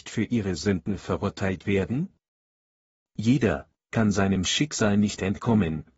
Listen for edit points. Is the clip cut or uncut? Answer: cut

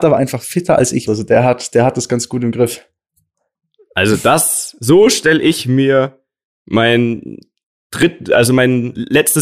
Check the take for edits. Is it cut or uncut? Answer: cut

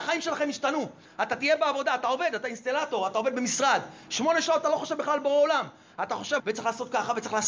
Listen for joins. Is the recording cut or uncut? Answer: cut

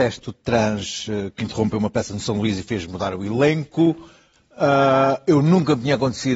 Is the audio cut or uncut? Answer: uncut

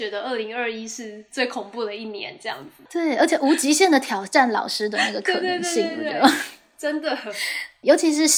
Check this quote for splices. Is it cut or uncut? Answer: uncut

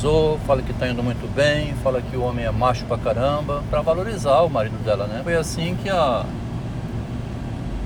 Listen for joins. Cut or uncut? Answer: cut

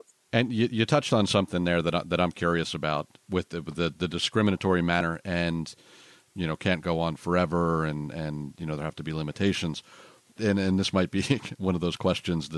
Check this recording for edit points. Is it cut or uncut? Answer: uncut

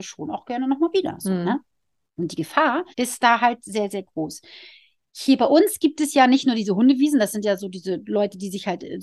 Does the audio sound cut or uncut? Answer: cut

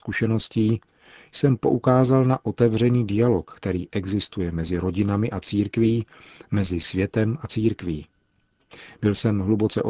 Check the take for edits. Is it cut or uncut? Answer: uncut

